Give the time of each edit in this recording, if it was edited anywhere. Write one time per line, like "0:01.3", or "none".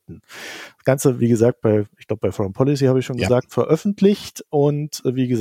none